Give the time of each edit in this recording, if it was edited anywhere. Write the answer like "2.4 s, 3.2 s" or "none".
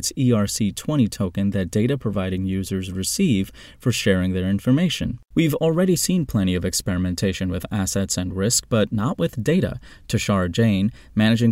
5.3 s